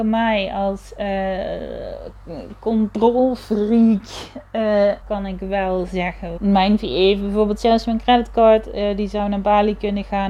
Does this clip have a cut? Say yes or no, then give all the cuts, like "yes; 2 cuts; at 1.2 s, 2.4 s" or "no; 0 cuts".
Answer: yes; 2 cuts; at 5.0 s, 6.4 s